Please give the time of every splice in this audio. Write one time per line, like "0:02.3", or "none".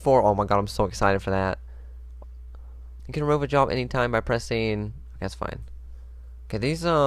0:03.0